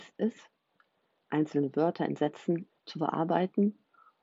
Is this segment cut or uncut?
cut